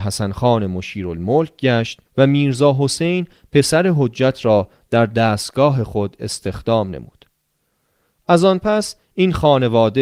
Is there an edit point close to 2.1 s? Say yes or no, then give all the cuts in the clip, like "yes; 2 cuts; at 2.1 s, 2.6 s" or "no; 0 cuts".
yes; 1 cut; at 2.1 s